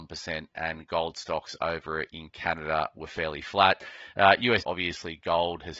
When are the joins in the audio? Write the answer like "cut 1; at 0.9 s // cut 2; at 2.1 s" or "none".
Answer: cut 1; at 4.6 s